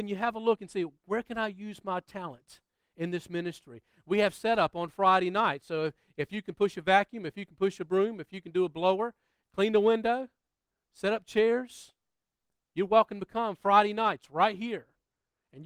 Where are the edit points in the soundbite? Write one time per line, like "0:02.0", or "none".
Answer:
none